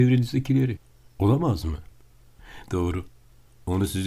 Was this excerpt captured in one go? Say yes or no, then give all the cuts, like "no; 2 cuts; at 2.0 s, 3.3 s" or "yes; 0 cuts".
no; 1 cut; at 2.6 s